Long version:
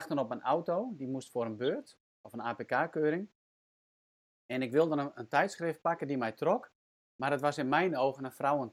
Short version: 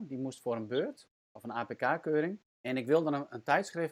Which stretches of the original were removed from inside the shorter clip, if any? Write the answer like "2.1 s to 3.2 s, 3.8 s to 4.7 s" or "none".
3.4 s to 4.3 s